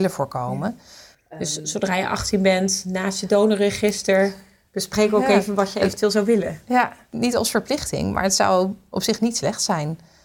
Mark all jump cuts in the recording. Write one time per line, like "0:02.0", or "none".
none